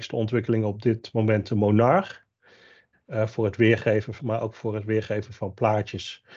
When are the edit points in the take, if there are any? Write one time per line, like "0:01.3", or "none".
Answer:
0:02.9
0:04.2